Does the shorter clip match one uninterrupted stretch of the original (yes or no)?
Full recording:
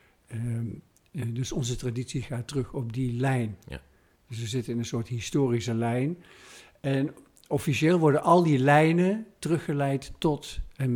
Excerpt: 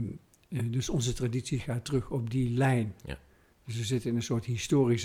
yes